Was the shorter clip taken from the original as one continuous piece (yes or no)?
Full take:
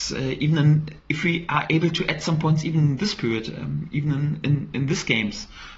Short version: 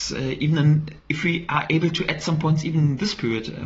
yes